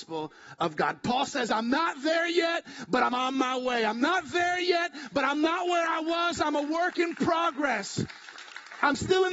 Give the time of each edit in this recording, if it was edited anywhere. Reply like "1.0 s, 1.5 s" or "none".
none